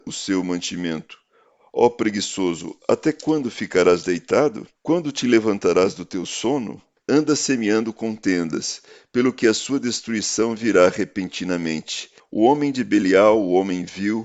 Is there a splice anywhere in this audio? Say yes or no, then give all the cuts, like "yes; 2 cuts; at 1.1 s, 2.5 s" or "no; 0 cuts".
yes; 3 cuts; at 4.8 s, 7.0 s, 12.2 s